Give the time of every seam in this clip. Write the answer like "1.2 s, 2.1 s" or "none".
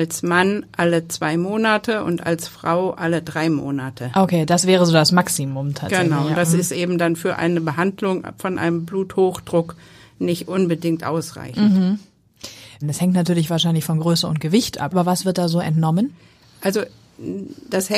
12.8 s, 14.9 s